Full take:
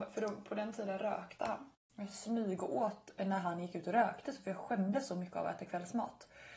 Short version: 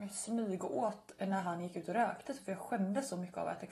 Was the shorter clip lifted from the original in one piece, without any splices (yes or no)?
yes